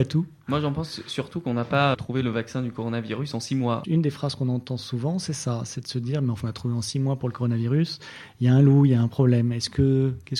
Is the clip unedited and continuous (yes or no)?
no